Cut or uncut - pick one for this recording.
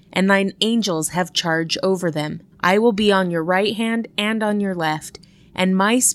cut